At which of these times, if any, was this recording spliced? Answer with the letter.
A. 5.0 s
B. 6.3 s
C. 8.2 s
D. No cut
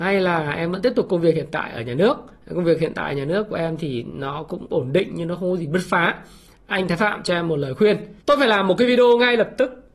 C